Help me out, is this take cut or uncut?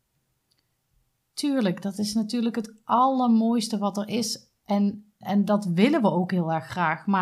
cut